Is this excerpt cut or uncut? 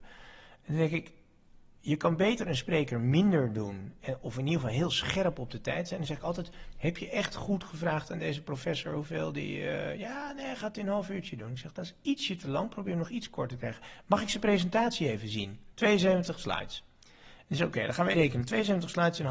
cut